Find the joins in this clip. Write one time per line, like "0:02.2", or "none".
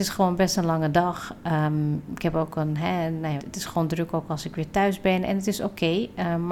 0:03.4